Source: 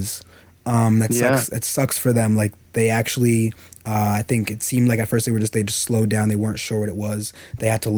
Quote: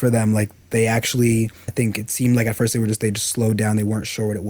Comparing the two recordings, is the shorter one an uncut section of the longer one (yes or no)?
no